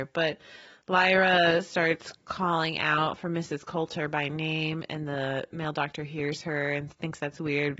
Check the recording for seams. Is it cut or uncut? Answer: uncut